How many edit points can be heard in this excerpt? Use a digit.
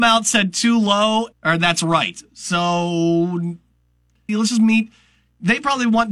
2